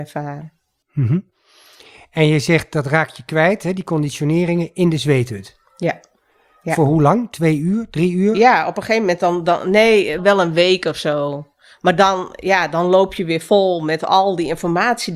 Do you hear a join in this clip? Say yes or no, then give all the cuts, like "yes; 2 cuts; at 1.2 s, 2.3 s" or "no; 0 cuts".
yes; 1 cut; at 10.2 s